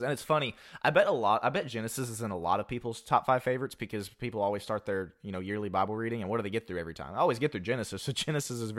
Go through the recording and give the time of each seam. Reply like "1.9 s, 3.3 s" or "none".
none

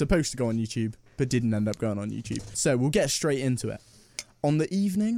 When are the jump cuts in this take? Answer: 2.5 s

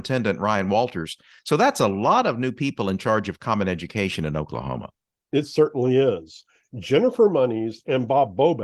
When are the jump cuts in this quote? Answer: none

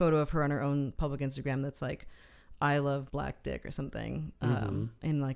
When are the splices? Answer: 3.1 s

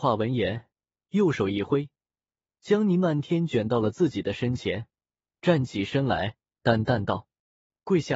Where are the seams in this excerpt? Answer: none

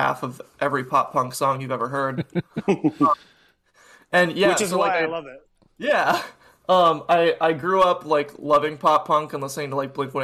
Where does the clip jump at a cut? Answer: none

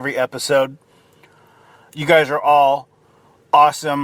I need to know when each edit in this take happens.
none

